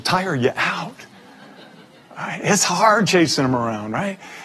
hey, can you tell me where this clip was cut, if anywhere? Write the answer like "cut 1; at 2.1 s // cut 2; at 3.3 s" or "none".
none